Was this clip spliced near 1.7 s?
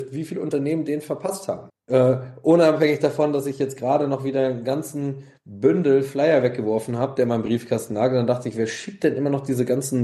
yes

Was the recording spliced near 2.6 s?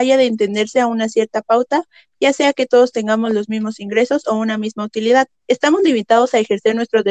no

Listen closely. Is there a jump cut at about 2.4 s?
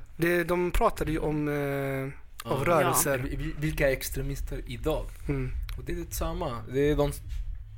yes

